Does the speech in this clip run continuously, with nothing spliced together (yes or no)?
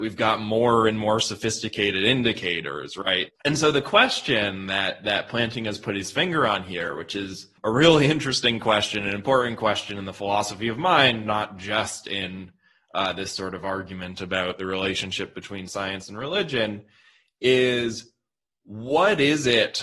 no